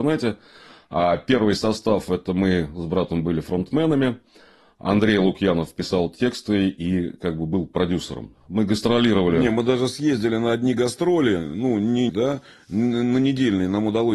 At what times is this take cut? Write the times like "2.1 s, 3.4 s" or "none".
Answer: 12.1 s